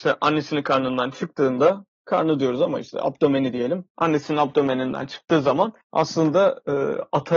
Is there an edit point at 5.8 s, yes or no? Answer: yes